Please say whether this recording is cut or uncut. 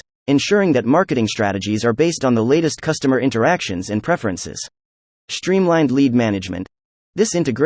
cut